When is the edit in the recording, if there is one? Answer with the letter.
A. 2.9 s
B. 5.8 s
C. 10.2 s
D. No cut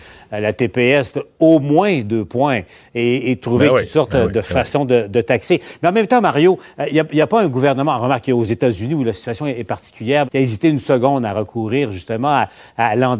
C